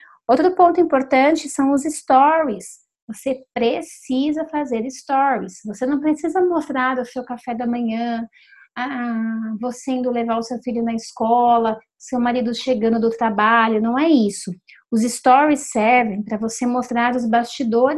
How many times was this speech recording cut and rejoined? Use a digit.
0